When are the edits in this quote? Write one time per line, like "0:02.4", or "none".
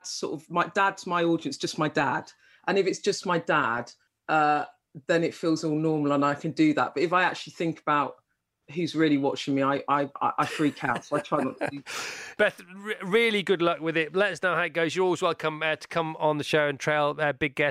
none

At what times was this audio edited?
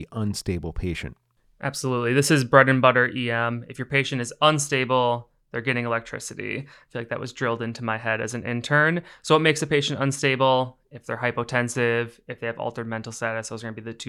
none

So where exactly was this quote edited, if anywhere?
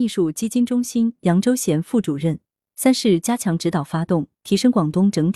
0:02.7
0:04.4

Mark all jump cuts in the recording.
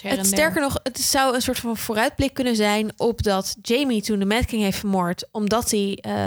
none

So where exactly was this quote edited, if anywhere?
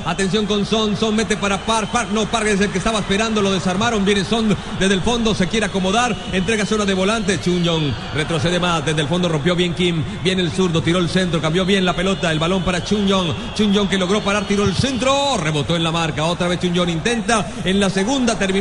none

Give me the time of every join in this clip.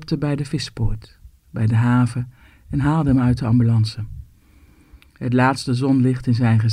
none

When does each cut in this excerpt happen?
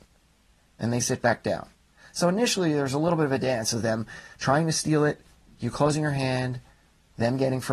none

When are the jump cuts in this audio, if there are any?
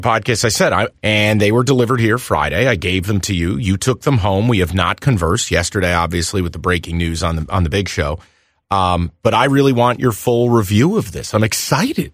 0:00.9

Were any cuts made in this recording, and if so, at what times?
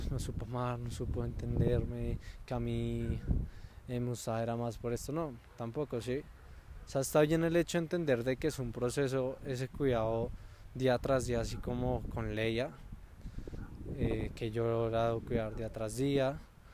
none

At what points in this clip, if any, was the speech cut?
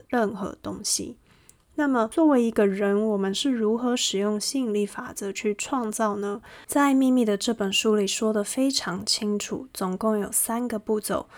none

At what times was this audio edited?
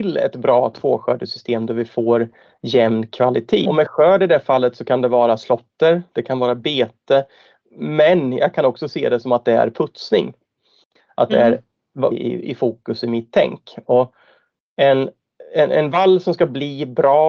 0:03.6
0:11.1
0:12.1

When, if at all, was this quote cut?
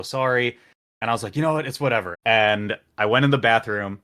0:02.1

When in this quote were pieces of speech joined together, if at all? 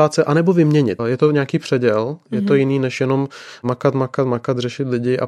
0:01.0

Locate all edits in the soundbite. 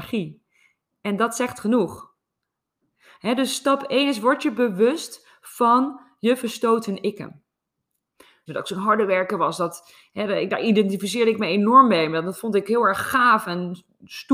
0:08.5

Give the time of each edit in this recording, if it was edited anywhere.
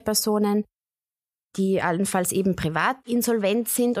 none

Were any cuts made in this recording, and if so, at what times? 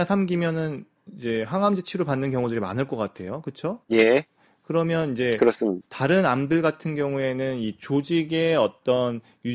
0:03.8

